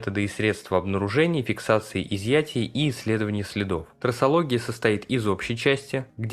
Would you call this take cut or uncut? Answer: uncut